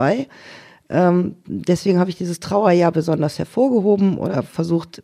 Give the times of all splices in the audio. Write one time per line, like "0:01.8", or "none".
none